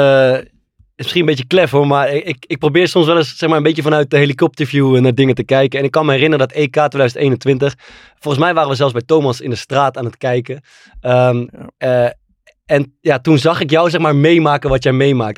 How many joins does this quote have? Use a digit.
0